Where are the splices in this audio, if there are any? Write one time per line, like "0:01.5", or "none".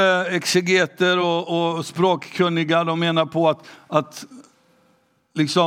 none